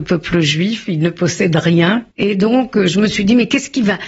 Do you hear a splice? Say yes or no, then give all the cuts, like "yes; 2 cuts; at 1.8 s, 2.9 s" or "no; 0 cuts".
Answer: yes; 1 cut; at 2.1 s